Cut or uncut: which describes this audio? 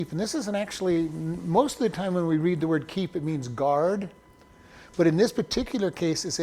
uncut